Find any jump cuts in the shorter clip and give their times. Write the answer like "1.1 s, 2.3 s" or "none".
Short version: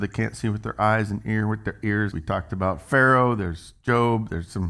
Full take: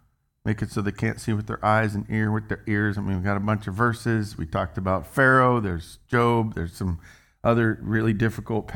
2.1 s